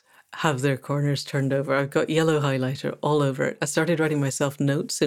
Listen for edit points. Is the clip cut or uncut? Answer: uncut